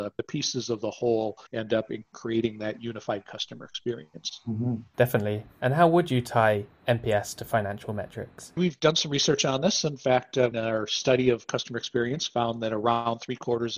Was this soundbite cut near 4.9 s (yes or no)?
no